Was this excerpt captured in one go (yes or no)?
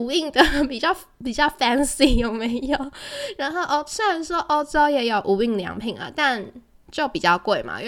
yes